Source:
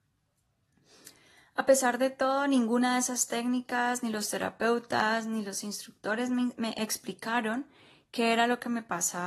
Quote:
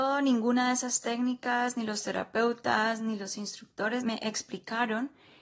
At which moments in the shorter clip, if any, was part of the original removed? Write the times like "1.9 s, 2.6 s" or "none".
4.0 s

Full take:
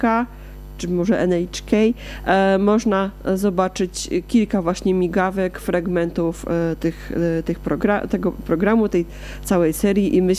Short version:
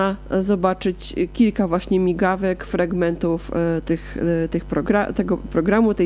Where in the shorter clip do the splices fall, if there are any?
none

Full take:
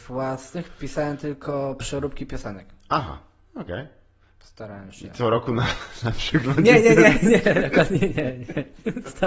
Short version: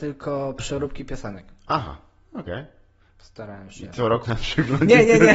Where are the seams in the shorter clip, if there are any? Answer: 4.2 s

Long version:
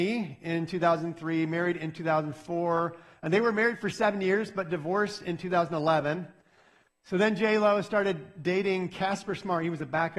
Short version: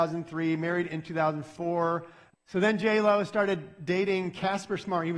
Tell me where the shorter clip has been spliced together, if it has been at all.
2.3 s

